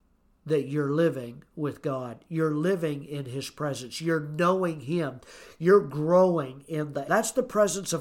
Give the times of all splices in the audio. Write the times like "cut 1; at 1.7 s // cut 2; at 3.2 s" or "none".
cut 1; at 7.0 s

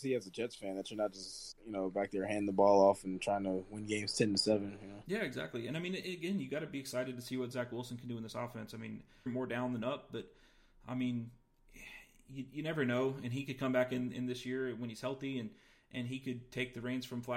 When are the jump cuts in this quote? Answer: cut 1; at 9.3 s

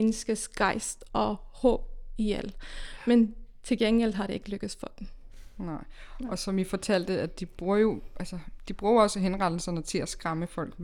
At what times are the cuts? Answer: none

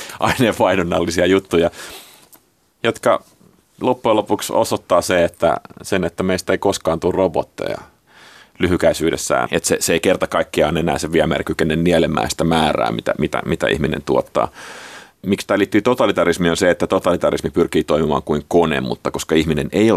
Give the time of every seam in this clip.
cut 1; at 9.5 s

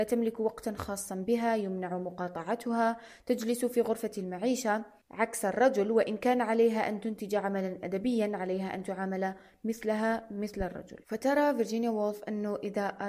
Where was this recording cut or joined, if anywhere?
cut 1; at 11.0 s

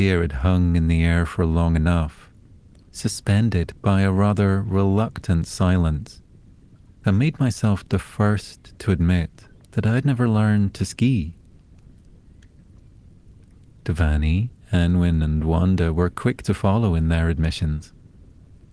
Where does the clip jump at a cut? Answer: none

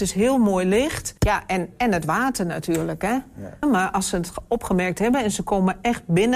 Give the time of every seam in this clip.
cut 1; at 1.2 s // cut 2; at 3.6 s

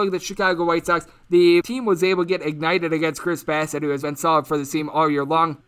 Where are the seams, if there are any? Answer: cut 1; at 4.0 s

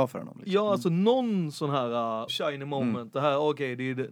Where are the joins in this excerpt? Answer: cut 1; at 2.3 s

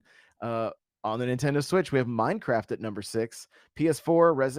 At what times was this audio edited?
none

